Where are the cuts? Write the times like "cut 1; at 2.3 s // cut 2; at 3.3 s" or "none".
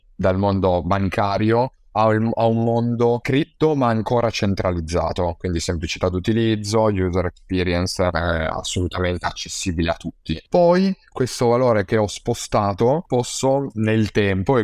none